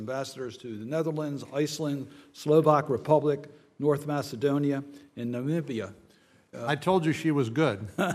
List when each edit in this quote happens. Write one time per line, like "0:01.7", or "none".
0:06.5